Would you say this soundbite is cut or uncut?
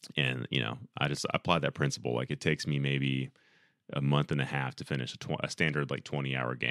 uncut